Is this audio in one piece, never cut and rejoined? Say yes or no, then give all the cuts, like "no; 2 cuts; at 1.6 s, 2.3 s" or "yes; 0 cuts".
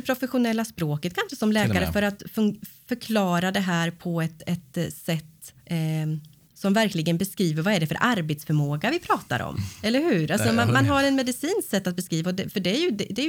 no; 1 cut; at 5.6 s